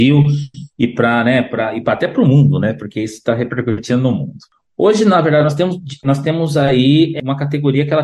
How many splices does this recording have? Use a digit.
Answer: 1